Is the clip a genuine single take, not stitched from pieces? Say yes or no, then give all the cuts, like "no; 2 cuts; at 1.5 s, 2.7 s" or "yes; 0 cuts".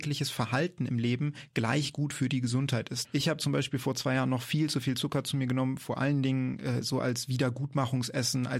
no; 1 cut; at 3.0 s